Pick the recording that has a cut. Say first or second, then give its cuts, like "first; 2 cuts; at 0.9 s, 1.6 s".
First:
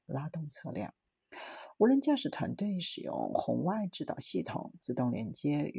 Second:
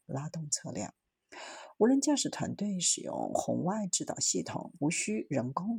second; 1 cut; at 4.8 s